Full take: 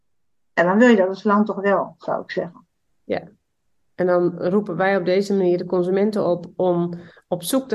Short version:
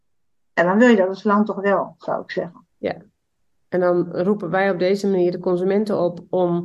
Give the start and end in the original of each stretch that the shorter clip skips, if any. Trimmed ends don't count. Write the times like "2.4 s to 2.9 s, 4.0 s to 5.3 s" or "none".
2.7 s to 3.0 s